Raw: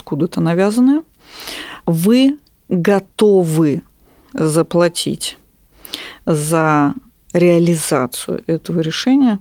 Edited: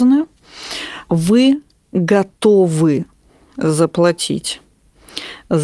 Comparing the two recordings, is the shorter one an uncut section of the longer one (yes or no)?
yes